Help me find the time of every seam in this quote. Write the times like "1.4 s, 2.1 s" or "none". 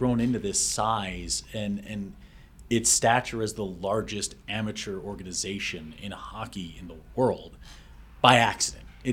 none